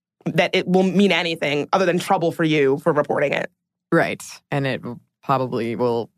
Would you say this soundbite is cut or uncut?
cut